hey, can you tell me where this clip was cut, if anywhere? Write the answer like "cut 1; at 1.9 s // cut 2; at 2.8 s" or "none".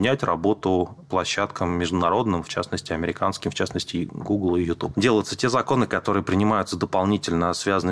cut 1; at 4.9 s